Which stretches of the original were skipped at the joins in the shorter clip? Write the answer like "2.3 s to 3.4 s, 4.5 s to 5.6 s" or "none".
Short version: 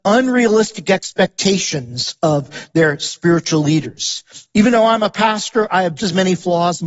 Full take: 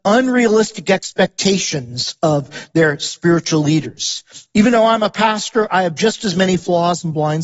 6.0 s to 6.2 s